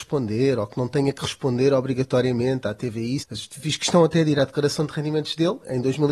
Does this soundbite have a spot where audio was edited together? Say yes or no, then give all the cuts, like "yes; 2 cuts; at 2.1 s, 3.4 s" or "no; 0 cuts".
yes; 1 cut; at 3.2 s